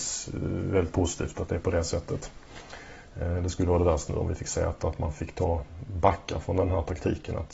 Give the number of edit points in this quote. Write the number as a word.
one